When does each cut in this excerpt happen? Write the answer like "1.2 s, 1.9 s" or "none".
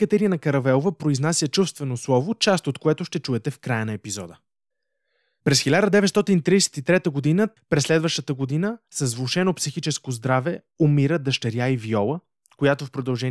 7.6 s